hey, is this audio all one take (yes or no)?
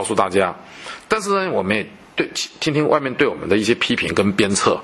yes